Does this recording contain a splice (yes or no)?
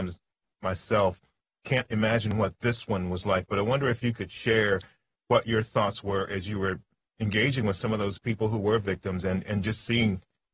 no